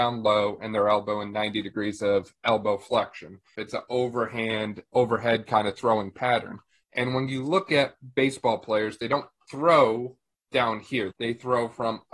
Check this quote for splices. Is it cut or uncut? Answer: cut